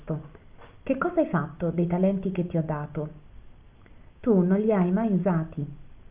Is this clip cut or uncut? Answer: uncut